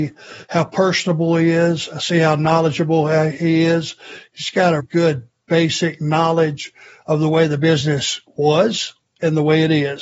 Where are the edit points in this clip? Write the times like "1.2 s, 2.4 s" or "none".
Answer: 4.8 s